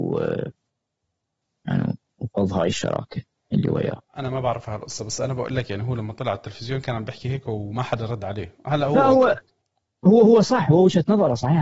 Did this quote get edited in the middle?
no; 0 cuts

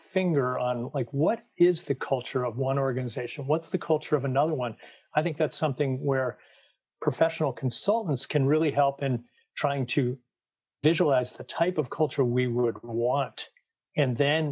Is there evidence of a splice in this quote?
no; 0 cuts

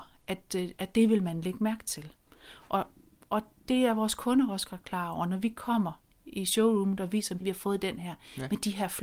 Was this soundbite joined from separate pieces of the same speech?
yes; 1 cut; at 7.4 s

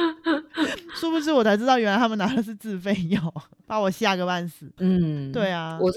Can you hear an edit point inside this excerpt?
yes; 2 cuts; at 3.6 s, 4.8 s

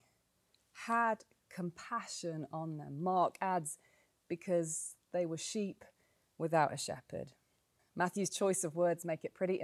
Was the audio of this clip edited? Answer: yes; 1 cut; at 7.8 s

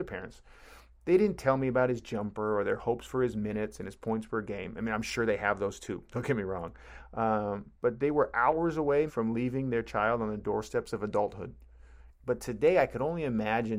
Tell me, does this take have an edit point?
yes; 2 cuts; at 9.1 s, 12.1 s

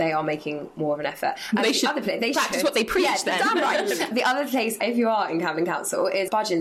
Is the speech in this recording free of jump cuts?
yes; 0 cuts

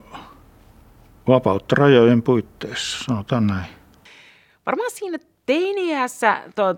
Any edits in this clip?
no; 0 cuts

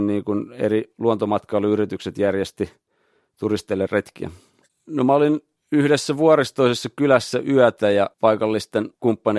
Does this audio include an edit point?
yes; 2 cuts; at 4.7 s, 8.1 s

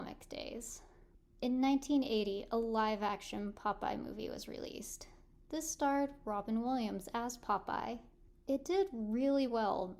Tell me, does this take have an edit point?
no; 0 cuts

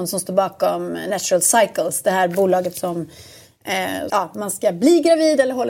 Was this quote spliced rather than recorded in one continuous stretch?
yes; 1 cut; at 4.1 s

